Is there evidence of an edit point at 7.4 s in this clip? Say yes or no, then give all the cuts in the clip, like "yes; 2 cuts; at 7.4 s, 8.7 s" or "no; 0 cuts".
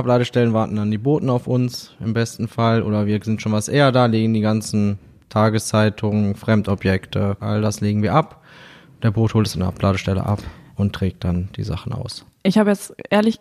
yes; 1 cut; at 7.4 s